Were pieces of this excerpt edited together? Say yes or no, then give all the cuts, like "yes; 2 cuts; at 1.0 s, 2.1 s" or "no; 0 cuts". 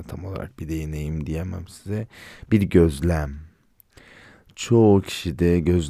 no; 0 cuts